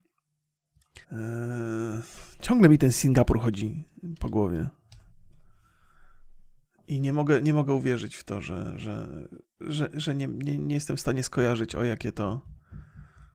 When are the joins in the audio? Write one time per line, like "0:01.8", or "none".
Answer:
0:01.0